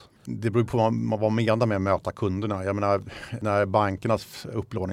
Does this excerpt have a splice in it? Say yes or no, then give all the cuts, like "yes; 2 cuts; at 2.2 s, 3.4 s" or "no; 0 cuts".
no; 0 cuts